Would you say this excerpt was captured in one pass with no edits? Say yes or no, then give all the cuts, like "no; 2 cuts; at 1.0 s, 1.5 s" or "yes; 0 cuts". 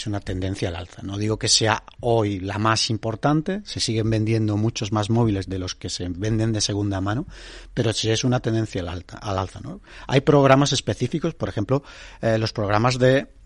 yes; 0 cuts